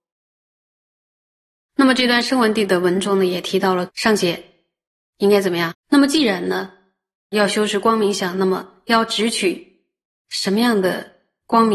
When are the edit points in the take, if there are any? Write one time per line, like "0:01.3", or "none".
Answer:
0:03.9
0:05.7